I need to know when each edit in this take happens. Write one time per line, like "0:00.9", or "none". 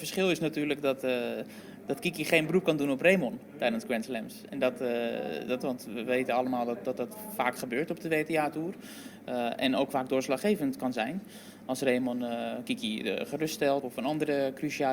0:05.6
0:13.8